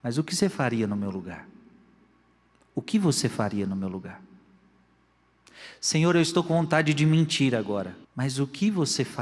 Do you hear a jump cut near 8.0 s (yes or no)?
yes